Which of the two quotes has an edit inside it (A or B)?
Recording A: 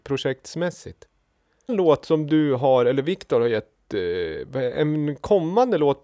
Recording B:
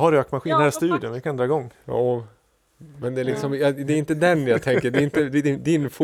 A